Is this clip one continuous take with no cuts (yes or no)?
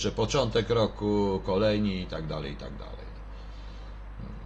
yes